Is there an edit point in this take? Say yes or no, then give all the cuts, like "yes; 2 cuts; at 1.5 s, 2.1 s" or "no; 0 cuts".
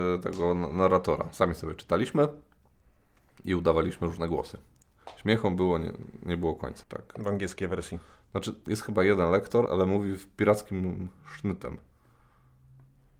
yes; 2 cuts; at 6.8 s, 9.7 s